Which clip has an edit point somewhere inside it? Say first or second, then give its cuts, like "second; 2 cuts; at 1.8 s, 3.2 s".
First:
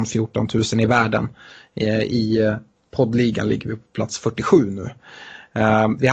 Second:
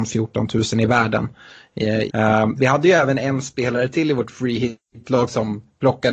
second; 1 cut; at 2.1 s